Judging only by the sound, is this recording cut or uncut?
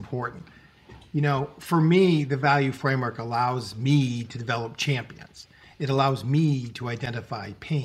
uncut